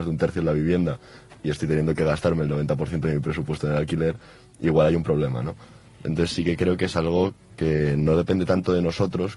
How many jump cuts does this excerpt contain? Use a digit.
0